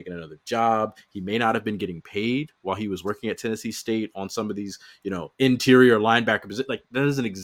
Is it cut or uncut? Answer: uncut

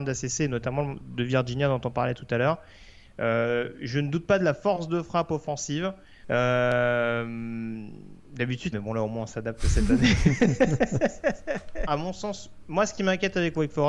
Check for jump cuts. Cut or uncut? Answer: cut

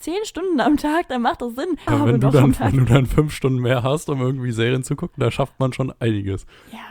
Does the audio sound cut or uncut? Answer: cut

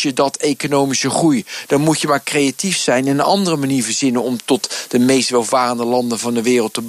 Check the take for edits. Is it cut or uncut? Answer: uncut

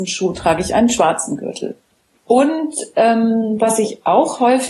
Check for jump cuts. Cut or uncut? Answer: cut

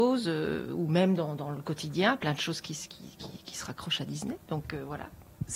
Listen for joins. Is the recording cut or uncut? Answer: uncut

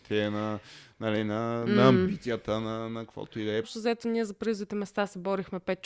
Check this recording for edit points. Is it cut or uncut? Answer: cut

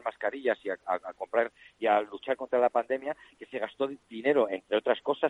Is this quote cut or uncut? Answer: uncut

